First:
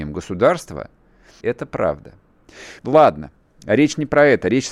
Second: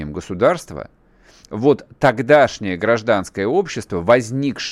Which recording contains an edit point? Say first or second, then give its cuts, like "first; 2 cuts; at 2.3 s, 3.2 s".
first; 2 cuts; at 1.4 s, 2.8 s